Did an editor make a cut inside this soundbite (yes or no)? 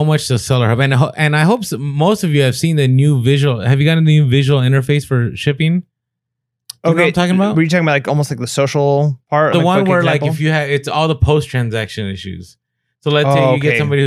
yes